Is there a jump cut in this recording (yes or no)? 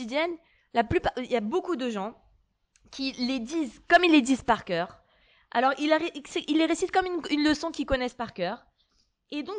no